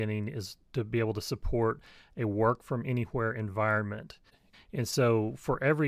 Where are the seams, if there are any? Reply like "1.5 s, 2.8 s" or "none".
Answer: 4.5 s